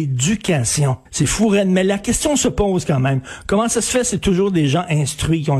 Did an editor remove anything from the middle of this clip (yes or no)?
yes